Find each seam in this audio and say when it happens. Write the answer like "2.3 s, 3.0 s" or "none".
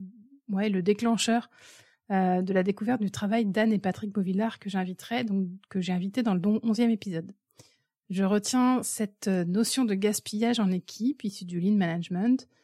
none